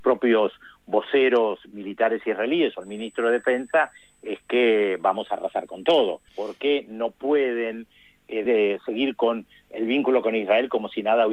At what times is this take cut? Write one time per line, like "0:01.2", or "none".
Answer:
0:06.3
0:08.5

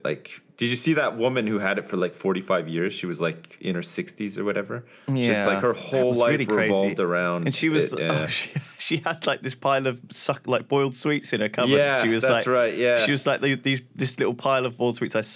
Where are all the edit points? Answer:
none

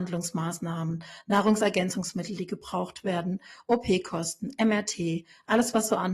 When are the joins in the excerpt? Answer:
none

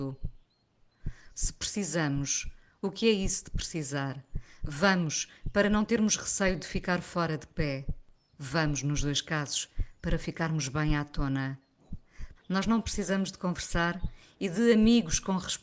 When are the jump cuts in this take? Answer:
0:01.3
0:12.4

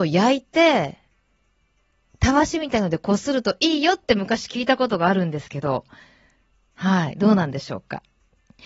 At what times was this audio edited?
none

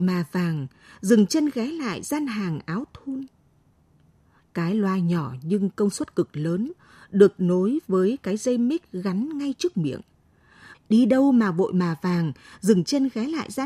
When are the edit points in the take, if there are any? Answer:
0:04.4
0:10.7

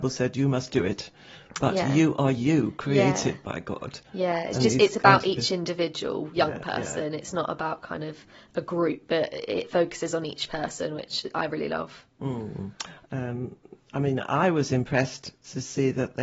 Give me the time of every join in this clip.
0:13.1

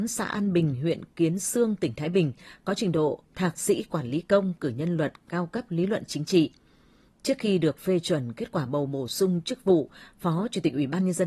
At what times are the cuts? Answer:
none

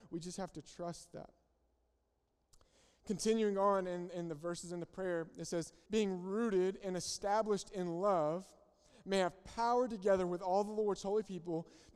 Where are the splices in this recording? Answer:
0:05.9

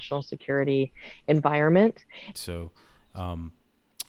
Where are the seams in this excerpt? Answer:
0:02.3

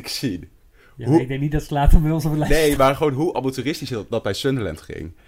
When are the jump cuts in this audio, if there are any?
0:02.8

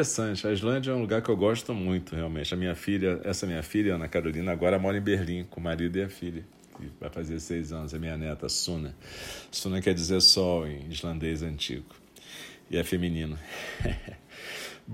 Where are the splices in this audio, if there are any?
none

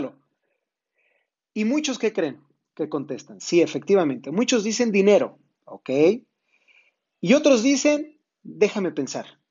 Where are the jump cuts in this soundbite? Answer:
none

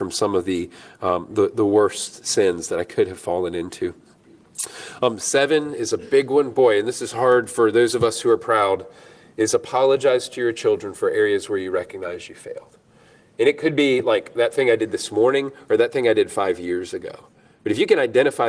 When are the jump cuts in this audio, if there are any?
none

